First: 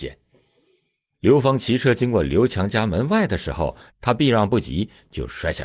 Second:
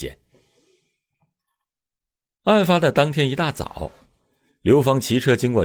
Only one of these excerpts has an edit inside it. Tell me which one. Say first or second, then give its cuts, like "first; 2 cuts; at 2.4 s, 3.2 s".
first; 2 cuts; at 1.1 s, 3.9 s